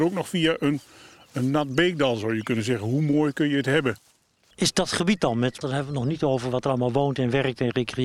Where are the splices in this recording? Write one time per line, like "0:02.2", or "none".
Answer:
0:04.5
0:05.6

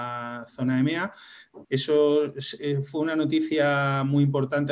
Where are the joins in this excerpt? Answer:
0:01.6

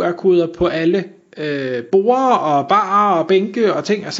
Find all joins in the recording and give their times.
none

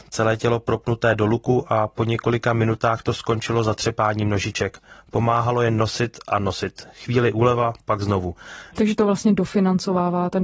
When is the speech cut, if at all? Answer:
0:08.7

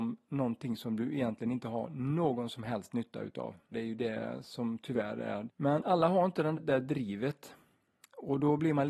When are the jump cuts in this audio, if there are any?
0:03.7
0:05.5
0:06.5

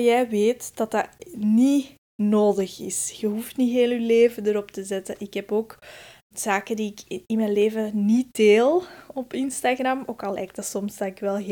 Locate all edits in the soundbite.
0:06.3

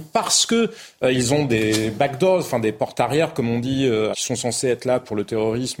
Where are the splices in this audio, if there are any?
0:04.1

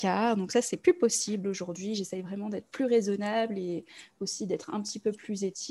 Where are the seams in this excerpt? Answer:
none

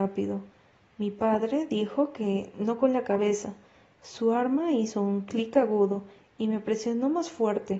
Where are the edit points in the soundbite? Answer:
none

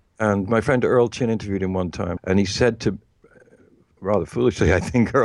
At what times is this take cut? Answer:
0:02.2

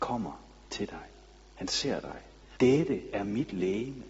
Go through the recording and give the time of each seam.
0:02.5

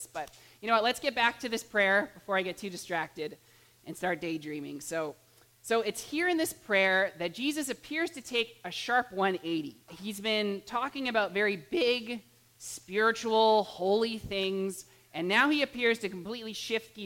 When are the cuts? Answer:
0:09.9

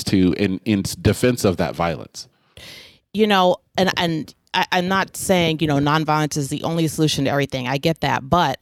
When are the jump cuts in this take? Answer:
none

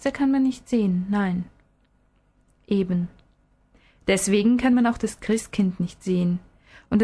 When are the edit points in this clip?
none

